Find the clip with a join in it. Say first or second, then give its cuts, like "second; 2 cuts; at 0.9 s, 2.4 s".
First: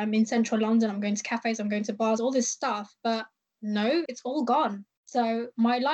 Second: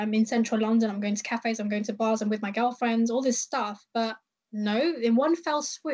first; 2 cuts; at 2.2 s, 4.1 s